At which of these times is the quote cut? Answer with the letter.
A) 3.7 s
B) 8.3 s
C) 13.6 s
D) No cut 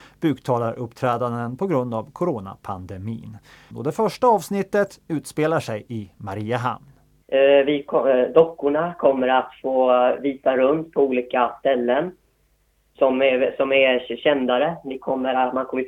A